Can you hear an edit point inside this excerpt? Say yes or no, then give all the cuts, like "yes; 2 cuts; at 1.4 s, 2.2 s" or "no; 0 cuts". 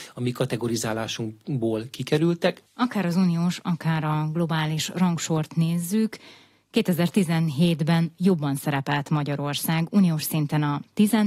no; 0 cuts